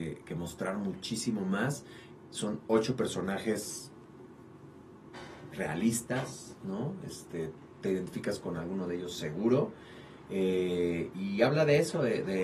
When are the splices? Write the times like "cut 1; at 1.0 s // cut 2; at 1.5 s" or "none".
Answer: none